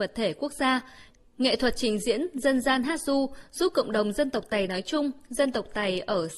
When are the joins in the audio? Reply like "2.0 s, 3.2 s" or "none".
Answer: none